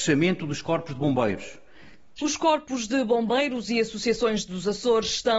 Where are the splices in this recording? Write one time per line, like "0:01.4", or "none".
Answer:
0:02.2